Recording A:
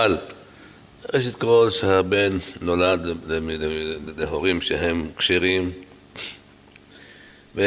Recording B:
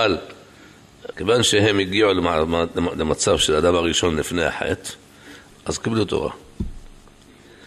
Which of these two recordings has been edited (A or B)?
B